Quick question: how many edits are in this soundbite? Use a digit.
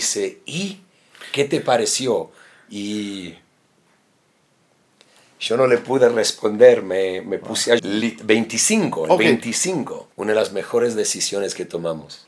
2